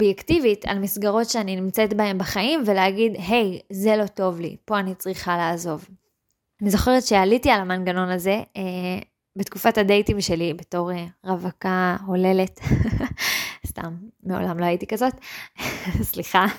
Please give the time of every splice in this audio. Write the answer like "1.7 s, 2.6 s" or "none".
none